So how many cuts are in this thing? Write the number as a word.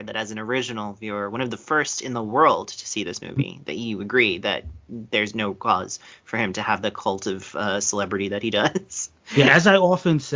zero